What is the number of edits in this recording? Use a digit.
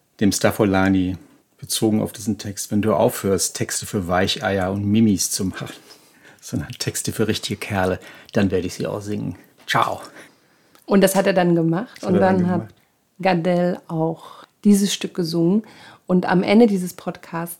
0